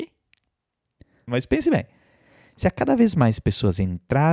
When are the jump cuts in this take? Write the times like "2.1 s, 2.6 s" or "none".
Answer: 1.3 s